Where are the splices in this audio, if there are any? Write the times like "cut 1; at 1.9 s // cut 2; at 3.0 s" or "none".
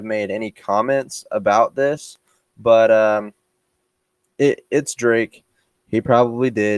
none